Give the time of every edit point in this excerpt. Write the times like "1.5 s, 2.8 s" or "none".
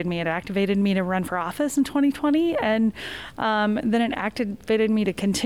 none